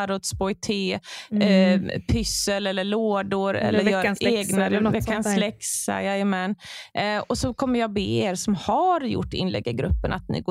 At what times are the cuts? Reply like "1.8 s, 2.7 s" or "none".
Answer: none

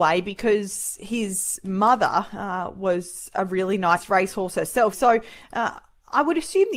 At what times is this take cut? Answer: 4.9 s

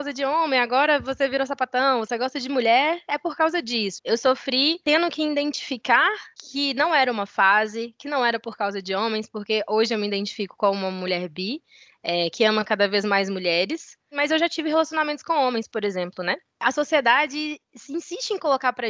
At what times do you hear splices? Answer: 4.0 s

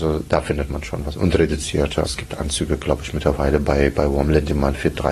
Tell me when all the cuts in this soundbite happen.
2.1 s

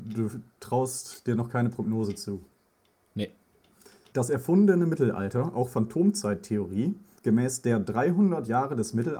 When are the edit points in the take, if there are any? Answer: 4.1 s, 7.2 s

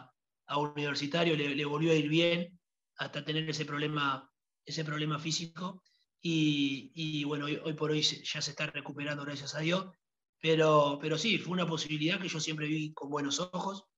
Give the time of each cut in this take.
none

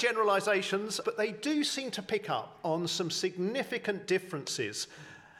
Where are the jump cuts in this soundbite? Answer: 1.0 s

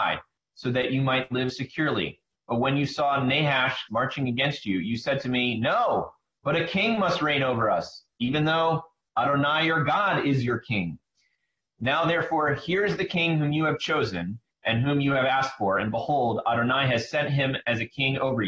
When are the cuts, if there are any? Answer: 3.9 s

